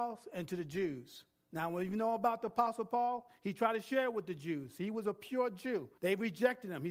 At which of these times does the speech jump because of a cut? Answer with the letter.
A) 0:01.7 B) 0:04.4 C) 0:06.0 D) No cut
C